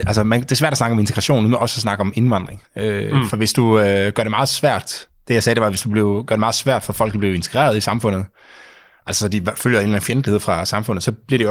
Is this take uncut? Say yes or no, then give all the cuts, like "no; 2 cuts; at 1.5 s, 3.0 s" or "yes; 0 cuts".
yes; 0 cuts